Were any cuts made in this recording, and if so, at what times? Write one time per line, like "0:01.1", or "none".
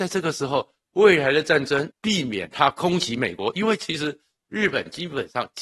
0:01.9

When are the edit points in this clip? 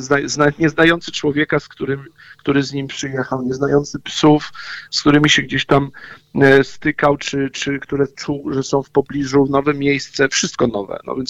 none

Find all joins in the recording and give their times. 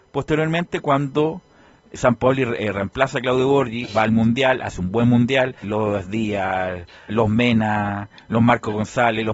0:03.9
0:05.6
0:07.1

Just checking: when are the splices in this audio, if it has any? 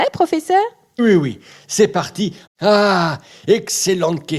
0:01.0
0:02.5

